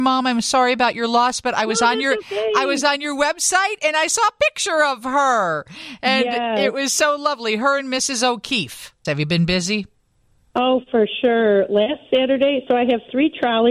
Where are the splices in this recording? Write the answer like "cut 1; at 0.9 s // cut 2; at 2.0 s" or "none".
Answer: cut 1; at 9.0 s